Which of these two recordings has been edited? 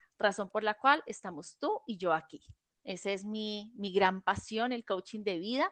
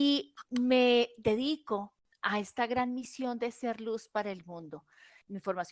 first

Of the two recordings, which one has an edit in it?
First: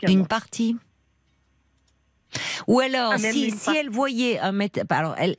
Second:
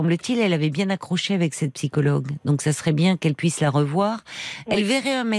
first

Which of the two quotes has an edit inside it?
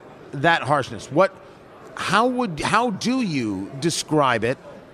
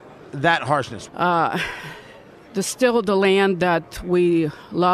second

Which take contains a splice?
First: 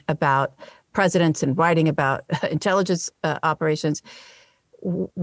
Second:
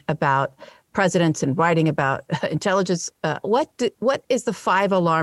second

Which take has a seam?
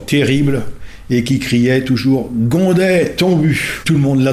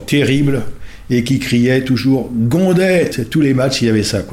second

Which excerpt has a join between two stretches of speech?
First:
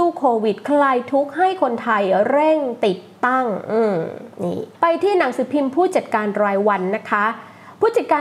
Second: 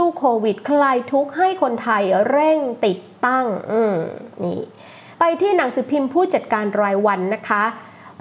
first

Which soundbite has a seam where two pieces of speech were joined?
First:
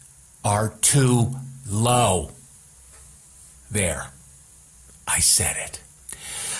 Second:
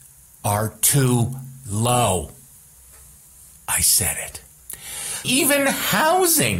second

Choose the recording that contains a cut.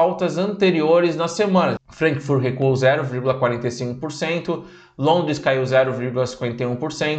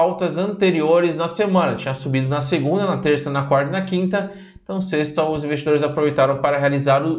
first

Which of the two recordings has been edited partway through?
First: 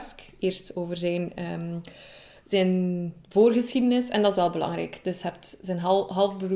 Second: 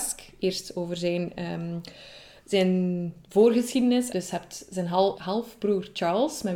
second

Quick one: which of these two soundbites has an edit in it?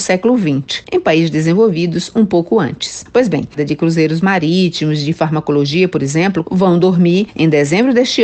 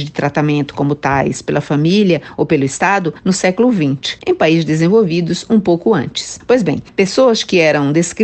first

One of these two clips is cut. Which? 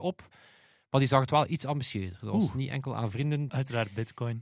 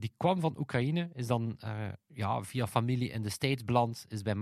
first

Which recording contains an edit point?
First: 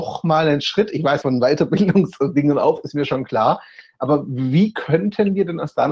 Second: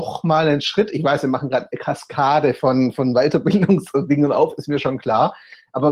first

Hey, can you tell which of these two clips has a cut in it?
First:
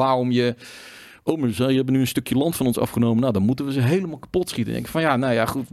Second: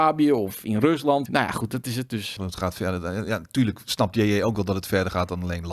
second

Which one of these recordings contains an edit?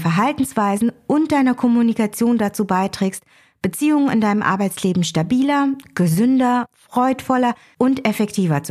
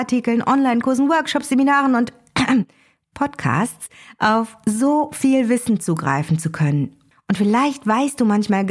second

